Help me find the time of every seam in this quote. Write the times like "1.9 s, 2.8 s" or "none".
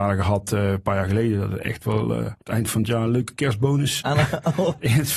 2.4 s, 4.0 s